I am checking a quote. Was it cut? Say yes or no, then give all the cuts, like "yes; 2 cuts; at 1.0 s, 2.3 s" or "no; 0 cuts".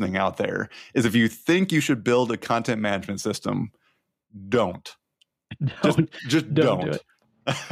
no; 0 cuts